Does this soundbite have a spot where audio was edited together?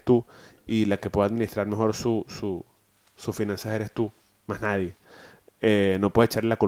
no; 0 cuts

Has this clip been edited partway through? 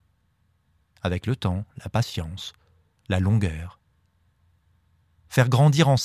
no; 0 cuts

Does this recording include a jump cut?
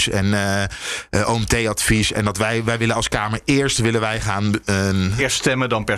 no; 0 cuts

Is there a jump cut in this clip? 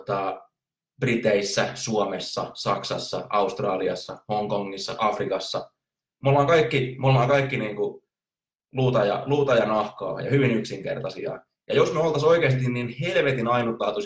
no; 0 cuts

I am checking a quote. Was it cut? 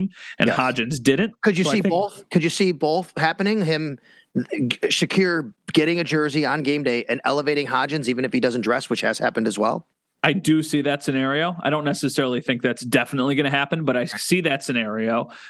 no; 0 cuts

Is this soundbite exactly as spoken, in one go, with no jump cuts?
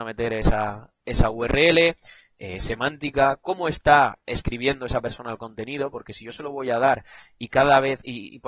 yes; 0 cuts

